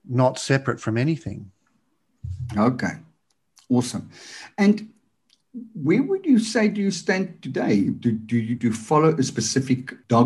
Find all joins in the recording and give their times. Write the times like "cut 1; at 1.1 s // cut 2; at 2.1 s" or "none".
cut 1; at 8.6 s